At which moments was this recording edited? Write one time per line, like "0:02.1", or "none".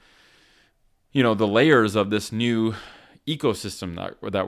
none